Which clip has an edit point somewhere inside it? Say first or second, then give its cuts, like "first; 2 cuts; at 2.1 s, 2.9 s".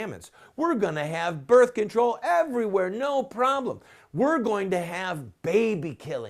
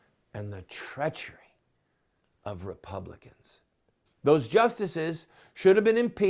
second; 1 cut; at 4.1 s